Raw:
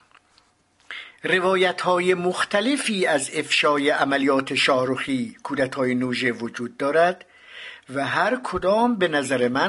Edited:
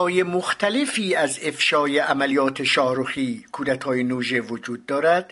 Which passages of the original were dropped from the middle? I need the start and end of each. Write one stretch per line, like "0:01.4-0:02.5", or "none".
none